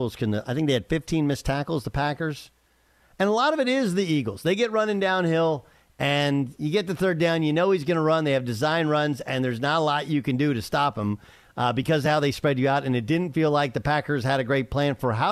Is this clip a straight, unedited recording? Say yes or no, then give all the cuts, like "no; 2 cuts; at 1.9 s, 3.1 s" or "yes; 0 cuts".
yes; 0 cuts